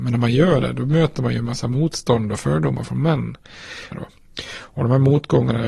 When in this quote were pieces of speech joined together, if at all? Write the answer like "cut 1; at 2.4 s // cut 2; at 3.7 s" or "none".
cut 1; at 3.9 s